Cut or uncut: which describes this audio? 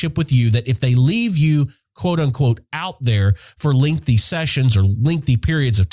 uncut